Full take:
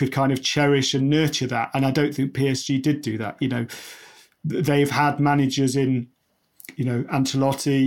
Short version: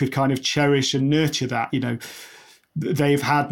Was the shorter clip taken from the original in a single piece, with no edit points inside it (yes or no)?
no